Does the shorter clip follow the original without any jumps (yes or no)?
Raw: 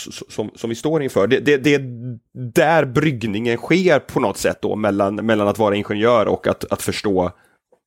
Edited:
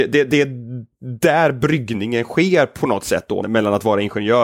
no